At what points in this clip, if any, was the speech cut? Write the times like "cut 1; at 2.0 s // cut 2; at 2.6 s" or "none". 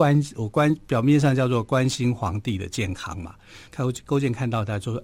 cut 1; at 3.7 s